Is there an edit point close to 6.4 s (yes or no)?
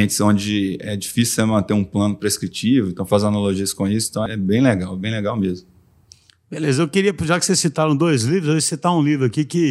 no